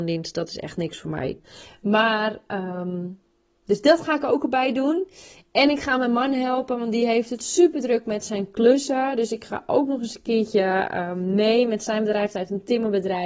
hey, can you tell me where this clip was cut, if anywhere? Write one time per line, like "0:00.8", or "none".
0:01.4